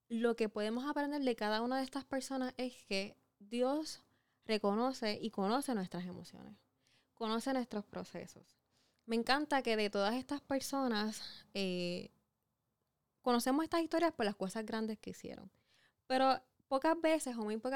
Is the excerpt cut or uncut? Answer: uncut